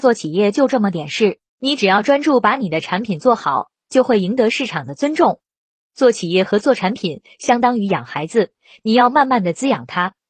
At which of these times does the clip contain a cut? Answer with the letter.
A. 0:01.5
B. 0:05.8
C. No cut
A